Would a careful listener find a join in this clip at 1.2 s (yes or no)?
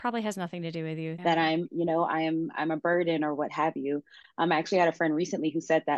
yes